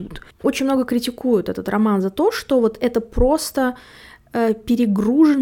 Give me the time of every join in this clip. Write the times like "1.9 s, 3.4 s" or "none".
none

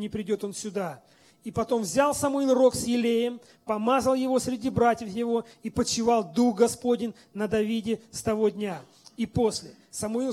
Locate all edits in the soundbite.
none

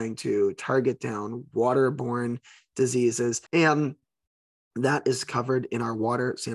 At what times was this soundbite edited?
3.5 s

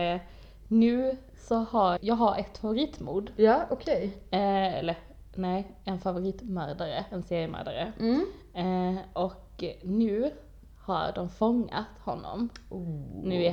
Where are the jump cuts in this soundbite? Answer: 2.0 s

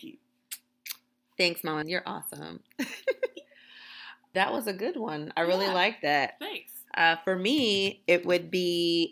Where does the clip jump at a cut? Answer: 4.3 s

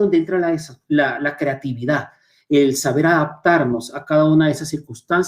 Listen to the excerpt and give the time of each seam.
1.2 s

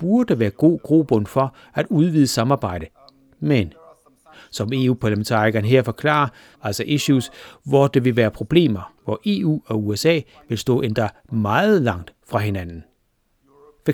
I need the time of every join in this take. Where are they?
6.6 s, 9.0 s

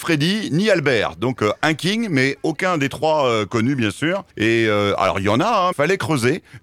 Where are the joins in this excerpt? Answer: 4.3 s, 5.7 s

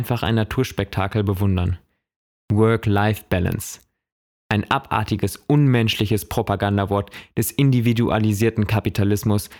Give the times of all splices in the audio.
2.3 s

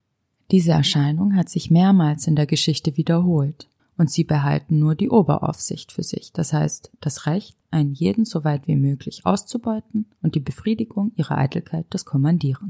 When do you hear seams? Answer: 3.8 s

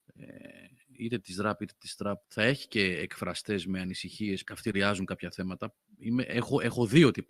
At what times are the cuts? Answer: 2.2 s, 4.4 s

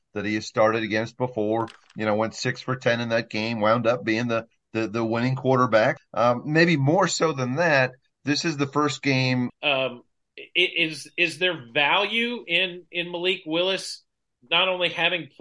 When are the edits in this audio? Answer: 6.0 s, 9.5 s

